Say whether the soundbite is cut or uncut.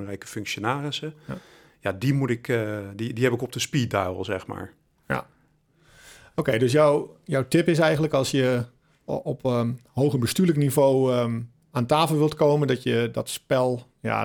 uncut